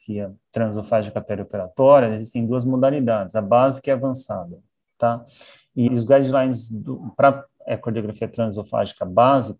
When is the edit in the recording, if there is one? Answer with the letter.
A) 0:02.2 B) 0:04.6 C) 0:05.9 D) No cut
C